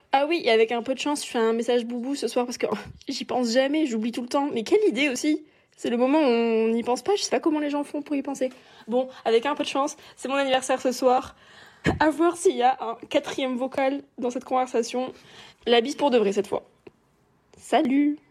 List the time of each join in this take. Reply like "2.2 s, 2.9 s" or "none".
11.8 s, 15.5 s